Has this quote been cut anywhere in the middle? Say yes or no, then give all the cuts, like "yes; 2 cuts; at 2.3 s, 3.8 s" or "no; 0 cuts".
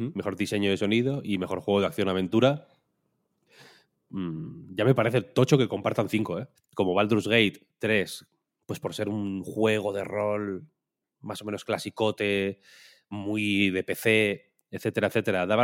yes; 1 cut; at 6.6 s